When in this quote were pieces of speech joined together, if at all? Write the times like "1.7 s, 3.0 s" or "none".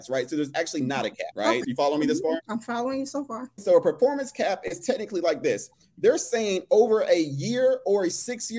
1.6 s, 3.6 s

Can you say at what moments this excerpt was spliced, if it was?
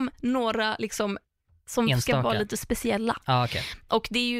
none

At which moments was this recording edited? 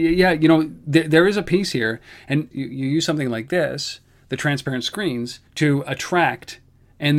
2.5 s, 5.5 s

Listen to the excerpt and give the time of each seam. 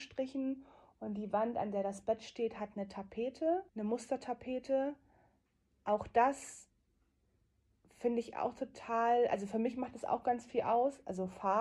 3.7 s

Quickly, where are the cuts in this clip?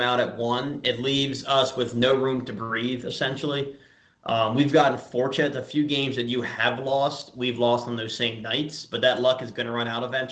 none

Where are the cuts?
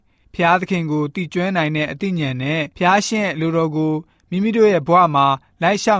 2.7 s

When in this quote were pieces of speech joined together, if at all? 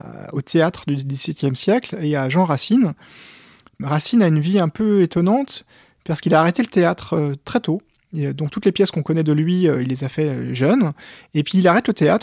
none

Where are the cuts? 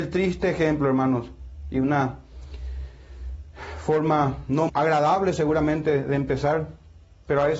4.7 s

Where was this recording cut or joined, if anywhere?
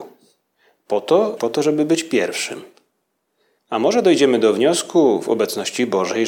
1.4 s, 3.6 s

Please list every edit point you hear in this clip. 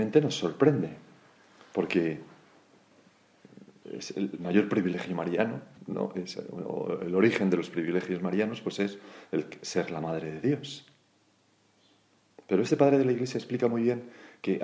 3.8 s

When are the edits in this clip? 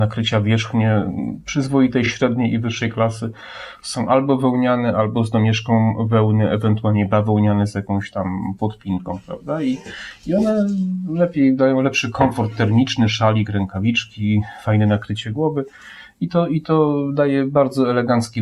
none

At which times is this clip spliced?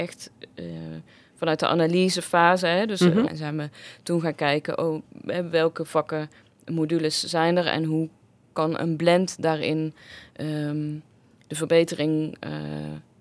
3.3 s

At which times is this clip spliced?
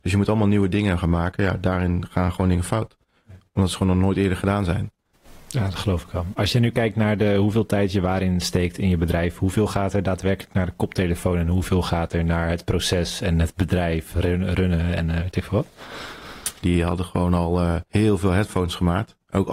16.6 s, 17.9 s

